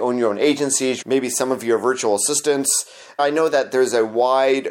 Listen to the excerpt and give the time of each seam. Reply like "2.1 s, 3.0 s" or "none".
1.0 s, 3.2 s